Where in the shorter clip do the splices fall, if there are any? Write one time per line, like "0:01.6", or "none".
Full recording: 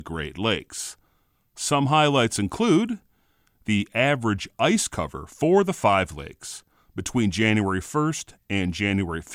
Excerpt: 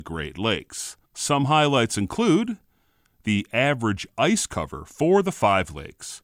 0:01.1